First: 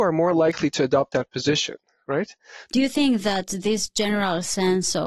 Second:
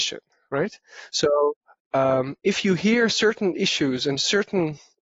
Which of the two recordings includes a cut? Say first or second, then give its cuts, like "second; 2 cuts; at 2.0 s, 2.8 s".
first; 1 cut; at 2.6 s